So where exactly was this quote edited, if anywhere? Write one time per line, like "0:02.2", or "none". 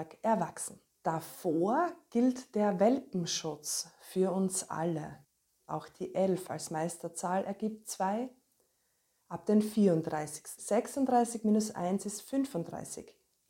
0:05.5
0:10.6